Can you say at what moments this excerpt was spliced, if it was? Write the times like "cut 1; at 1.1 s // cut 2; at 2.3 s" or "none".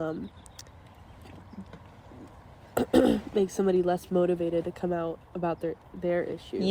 none